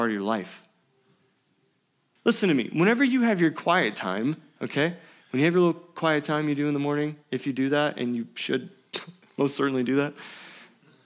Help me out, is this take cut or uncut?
cut